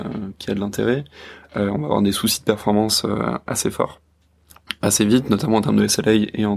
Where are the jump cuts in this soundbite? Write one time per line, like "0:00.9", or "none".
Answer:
none